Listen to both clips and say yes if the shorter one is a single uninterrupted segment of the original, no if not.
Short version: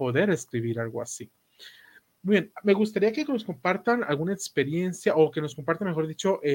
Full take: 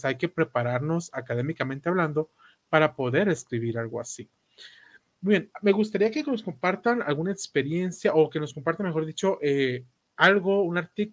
yes